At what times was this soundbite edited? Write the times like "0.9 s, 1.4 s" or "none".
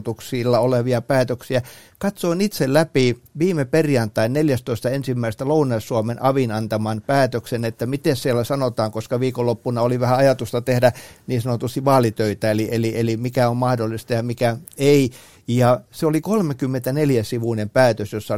none